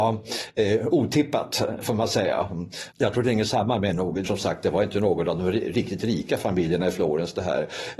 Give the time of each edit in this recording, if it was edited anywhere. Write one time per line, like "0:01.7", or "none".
0:02.9
0:04.2